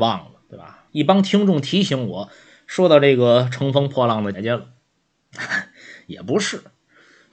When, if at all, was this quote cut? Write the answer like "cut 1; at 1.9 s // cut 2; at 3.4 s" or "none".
cut 1; at 4.3 s